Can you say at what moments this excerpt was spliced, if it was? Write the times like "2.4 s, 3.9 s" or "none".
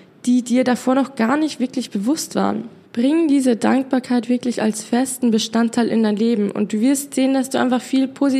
2.8 s